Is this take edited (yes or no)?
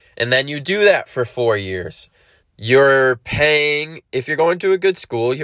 yes